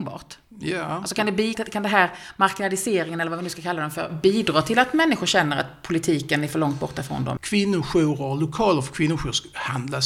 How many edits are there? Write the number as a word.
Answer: two